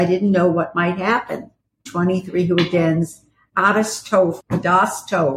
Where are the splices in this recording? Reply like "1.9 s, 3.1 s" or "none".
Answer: 1.9 s, 4.4 s